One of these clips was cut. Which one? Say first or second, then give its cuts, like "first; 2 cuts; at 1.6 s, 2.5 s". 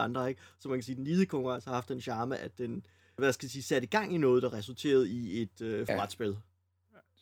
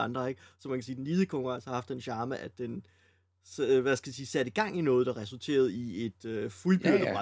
first; 2 cuts; at 3.2 s, 5.9 s